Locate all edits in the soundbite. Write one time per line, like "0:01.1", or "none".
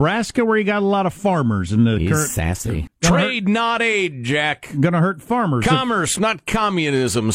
0:02.9